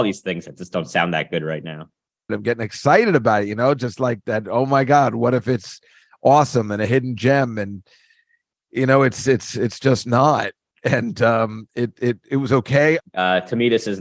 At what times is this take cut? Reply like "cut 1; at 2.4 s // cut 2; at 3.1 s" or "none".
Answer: cut 1; at 2.3 s // cut 2; at 13.0 s